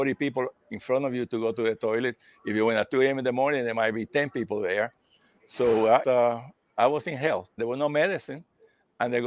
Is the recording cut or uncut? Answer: cut